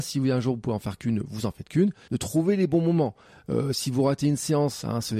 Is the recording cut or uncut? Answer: cut